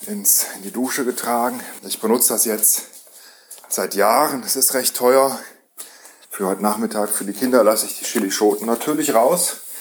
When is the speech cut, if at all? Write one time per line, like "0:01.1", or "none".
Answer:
0:01.8
0:06.2